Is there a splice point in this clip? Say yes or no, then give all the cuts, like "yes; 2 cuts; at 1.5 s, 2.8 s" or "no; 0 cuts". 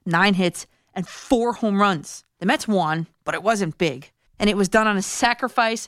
yes; 2 cuts; at 2.4 s, 4.3 s